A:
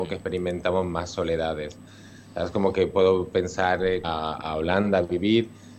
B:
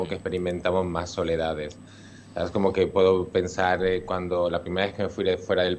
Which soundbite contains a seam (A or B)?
A